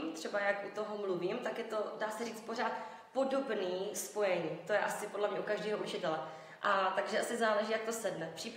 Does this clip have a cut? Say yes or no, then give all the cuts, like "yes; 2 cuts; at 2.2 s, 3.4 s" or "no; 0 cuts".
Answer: yes; 1 cut; at 6.6 s